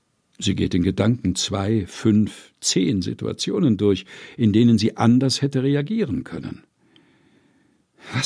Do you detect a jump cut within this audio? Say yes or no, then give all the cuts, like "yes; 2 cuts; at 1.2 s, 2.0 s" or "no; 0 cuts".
no; 0 cuts